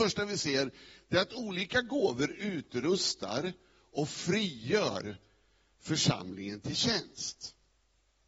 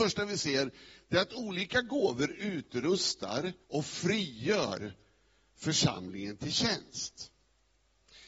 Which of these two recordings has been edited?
second; 1 cut; at 3.6 s

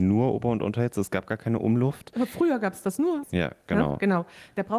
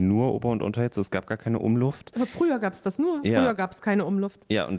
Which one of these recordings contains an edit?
first; 1 cut; at 3.2 s

